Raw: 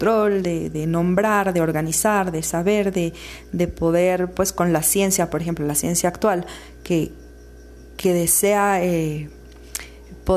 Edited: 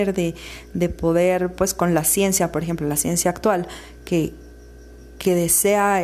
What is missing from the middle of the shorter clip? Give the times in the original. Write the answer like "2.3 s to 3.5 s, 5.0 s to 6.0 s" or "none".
none